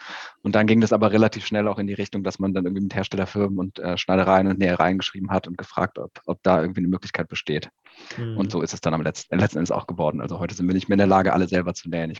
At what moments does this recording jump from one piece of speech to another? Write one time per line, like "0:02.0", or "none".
none